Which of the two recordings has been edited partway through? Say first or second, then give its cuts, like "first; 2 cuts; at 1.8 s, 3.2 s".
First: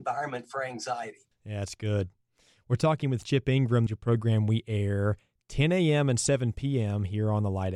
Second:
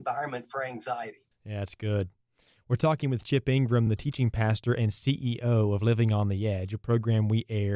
first; 1 cut; at 3.9 s